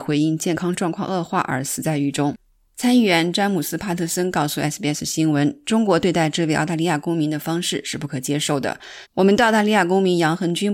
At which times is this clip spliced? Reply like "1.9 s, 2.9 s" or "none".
9.0 s